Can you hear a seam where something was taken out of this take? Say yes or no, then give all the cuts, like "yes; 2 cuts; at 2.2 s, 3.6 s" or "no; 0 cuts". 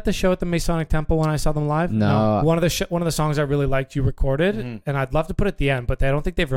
yes; 1 cut; at 2.4 s